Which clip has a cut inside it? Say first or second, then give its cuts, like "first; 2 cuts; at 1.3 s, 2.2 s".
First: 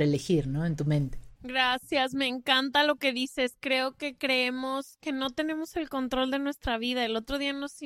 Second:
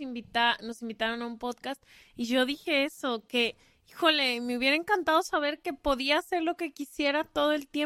first; 1 cut; at 1.4 s